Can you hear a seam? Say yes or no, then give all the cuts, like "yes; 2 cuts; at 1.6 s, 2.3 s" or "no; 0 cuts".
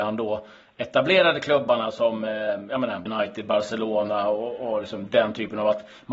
yes; 1 cut; at 3.1 s